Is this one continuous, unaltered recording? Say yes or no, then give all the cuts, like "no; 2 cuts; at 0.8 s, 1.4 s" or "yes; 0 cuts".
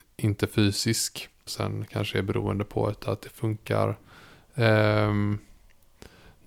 no; 1 cut; at 1.5 s